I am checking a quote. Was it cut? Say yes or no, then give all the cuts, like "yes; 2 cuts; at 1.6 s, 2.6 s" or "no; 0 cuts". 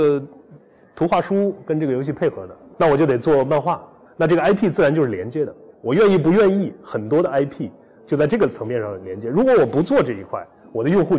no; 0 cuts